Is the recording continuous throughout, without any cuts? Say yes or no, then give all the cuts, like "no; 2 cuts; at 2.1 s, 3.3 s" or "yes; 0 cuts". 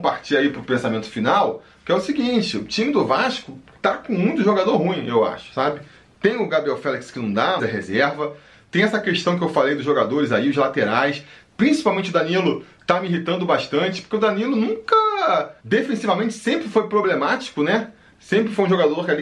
no; 2 cuts; at 7.6 s, 15.6 s